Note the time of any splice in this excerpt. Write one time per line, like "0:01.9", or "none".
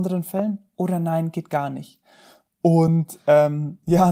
none